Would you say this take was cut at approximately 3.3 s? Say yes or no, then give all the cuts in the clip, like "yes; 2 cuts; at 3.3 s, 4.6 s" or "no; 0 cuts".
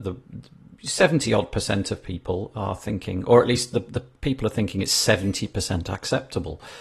no; 0 cuts